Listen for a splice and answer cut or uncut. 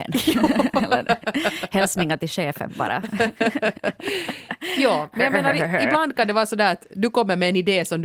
uncut